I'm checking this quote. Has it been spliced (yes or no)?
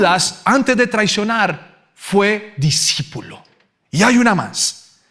no